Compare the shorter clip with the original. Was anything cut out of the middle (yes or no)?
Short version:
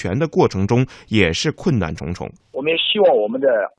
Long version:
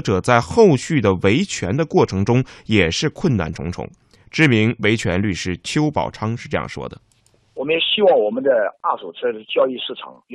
yes